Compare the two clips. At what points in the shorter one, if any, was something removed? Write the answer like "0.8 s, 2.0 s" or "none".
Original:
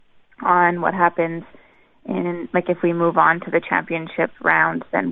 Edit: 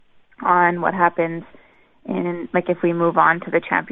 none